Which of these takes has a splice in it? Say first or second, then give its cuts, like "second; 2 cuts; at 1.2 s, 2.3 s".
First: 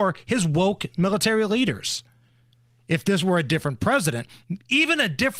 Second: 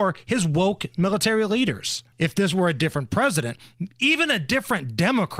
second; 1 cut; at 2.1 s